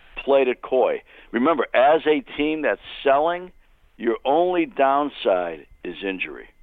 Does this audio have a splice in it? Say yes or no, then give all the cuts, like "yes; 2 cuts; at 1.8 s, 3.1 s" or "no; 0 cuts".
no; 0 cuts